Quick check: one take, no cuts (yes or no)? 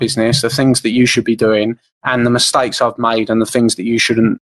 yes